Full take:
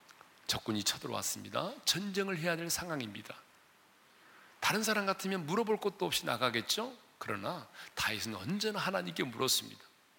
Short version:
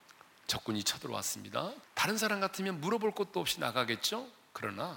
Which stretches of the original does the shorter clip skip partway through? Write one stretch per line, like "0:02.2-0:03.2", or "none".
0:01.8-0:04.5